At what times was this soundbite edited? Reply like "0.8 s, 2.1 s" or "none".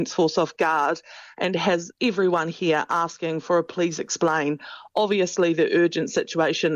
1.9 s